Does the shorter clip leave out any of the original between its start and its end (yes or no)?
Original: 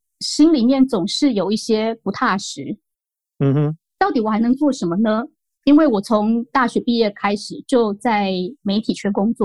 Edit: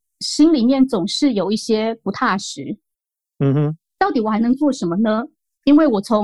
no